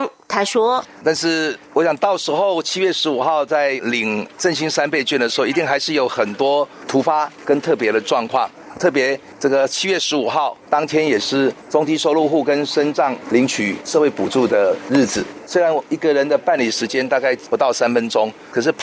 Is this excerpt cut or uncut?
uncut